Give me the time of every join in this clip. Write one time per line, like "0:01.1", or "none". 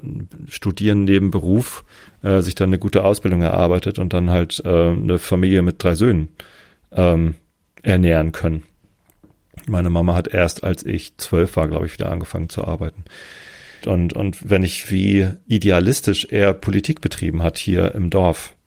0:13.8
0:14.8